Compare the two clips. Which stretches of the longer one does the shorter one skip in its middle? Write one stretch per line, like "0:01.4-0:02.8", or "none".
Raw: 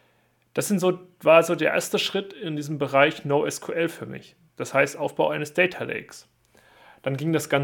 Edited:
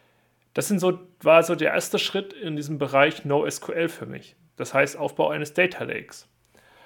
none

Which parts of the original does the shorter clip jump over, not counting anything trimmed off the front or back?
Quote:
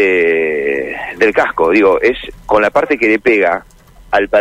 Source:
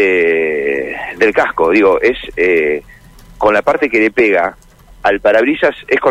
0:02.3-0:03.3

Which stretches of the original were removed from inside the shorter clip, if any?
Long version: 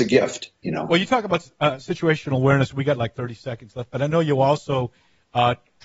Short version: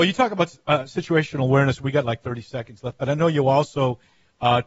none

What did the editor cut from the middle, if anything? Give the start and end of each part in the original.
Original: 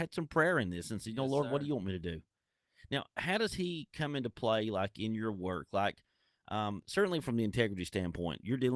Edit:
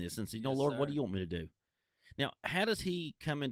none

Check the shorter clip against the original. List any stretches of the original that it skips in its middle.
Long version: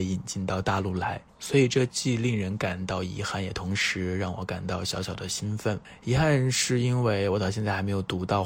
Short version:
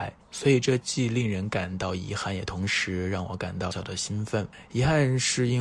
0:04.8-0:05.0

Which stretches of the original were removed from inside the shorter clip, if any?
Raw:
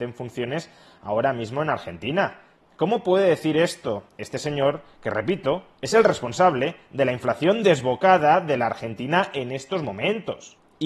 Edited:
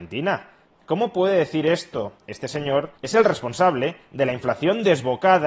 0:04.9-0:05.7

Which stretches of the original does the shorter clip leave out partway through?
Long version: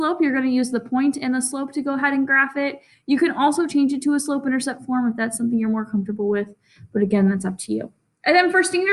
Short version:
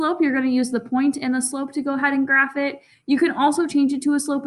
none

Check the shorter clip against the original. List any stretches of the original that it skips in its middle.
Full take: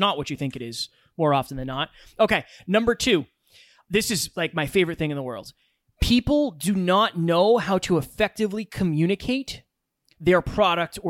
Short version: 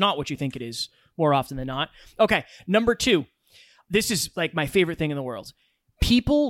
none

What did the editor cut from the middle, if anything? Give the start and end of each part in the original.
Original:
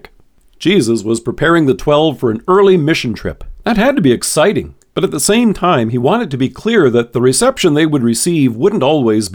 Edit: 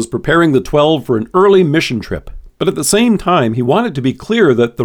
0:03.6-0:04.9

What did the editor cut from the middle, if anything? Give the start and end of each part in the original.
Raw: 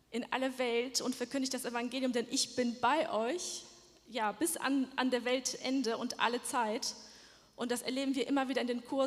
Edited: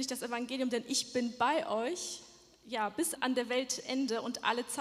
0:04.6-0:04.9

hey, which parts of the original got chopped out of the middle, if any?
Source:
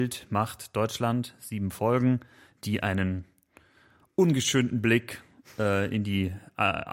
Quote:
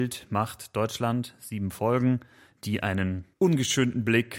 0:03.3-0:04.1

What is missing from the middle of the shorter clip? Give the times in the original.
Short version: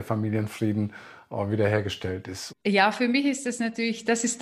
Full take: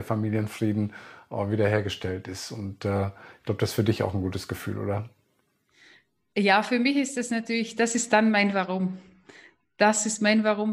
0:02.5-0:06.2

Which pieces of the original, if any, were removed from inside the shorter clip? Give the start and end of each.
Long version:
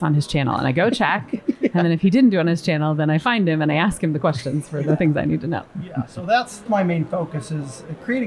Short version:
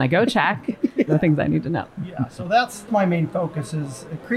0:01.7-0:04.8

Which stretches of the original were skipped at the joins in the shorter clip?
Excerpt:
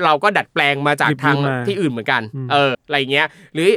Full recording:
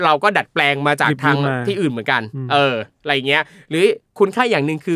0:02.7-0:02.9

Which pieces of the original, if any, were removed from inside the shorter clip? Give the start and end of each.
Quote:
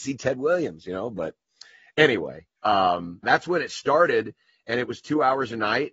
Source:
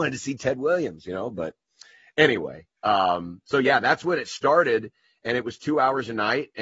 0:03.4-0:03.8

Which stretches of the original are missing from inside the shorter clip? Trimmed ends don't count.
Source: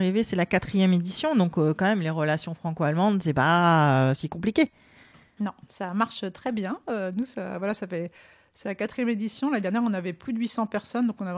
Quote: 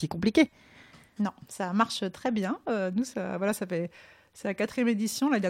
none

